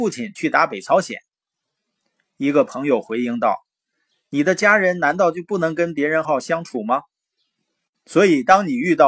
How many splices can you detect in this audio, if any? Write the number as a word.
one